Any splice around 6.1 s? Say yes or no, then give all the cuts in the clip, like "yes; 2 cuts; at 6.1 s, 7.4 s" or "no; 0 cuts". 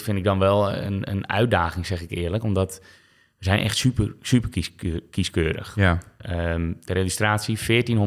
no; 0 cuts